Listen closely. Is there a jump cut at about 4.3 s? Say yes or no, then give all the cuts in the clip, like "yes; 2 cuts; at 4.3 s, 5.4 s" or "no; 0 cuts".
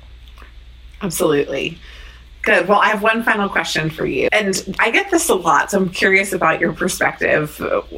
yes; 1 cut; at 4.3 s